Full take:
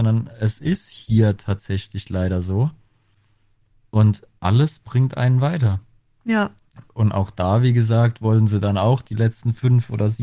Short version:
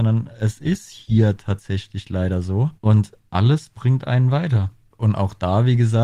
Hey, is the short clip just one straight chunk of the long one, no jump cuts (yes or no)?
no